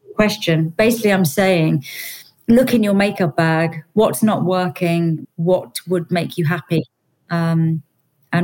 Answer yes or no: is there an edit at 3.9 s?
no